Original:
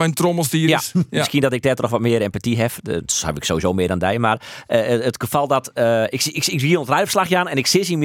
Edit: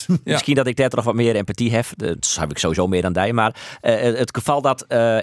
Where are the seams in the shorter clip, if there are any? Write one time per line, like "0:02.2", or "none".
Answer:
none